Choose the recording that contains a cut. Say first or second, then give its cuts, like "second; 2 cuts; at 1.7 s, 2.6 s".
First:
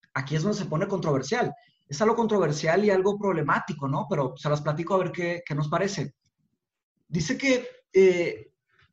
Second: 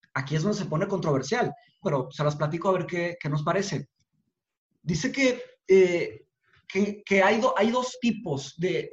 second; 1 cut; at 1.8 s